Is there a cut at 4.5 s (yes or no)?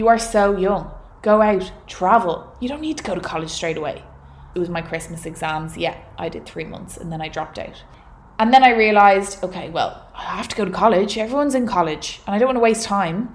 yes